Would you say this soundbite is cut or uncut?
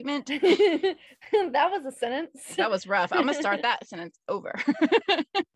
uncut